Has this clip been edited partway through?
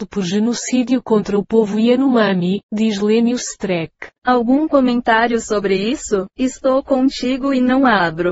yes; 2 cuts; at 4.1 s, 6.3 s

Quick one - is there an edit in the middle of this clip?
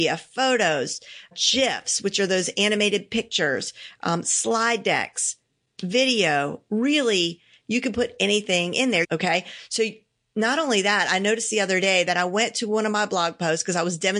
yes; 1 cut; at 9.0 s

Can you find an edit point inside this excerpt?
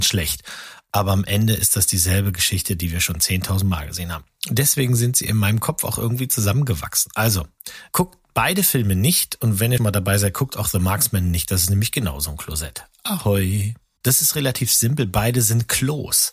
yes; 3 cuts; at 7.9 s, 9.8 s, 14.0 s

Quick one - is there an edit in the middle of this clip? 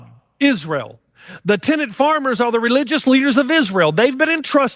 no; 0 cuts

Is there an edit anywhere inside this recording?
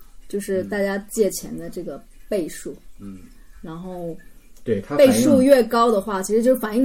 no; 0 cuts

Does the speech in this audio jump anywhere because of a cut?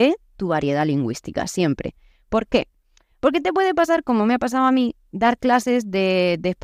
no; 0 cuts

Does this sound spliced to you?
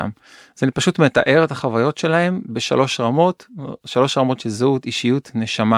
no; 0 cuts

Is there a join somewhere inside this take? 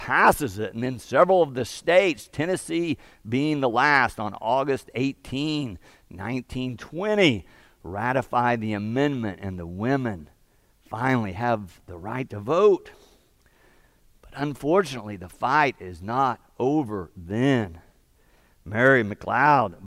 no; 0 cuts

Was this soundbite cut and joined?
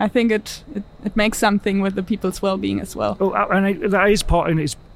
no; 0 cuts

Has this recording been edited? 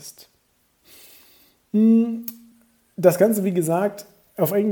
no; 0 cuts

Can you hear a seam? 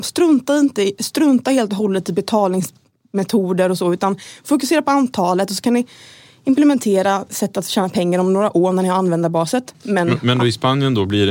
yes; 1 cut; at 9.7 s

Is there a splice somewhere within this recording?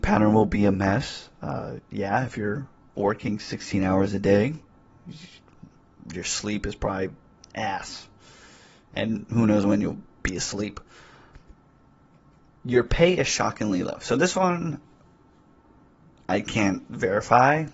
no; 0 cuts

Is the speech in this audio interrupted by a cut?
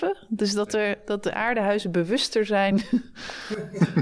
no; 0 cuts

